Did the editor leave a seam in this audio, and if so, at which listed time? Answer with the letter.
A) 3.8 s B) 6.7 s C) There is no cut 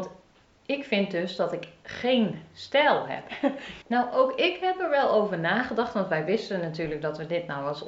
A